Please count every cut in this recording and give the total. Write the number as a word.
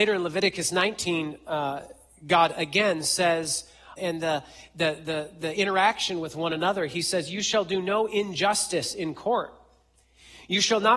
one